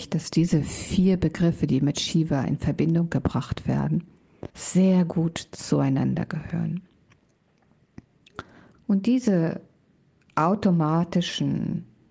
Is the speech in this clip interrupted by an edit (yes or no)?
yes